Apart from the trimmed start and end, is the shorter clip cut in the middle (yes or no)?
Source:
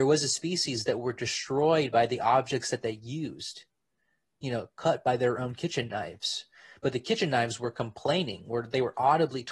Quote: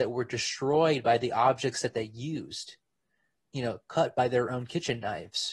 no